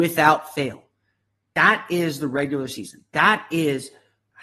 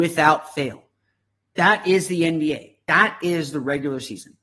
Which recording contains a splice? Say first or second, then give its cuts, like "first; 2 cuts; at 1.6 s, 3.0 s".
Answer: first; 1 cut; at 1.5 s